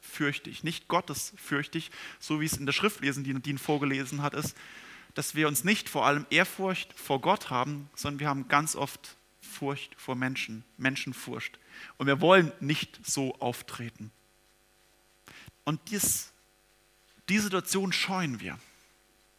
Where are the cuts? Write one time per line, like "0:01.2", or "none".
0:15.5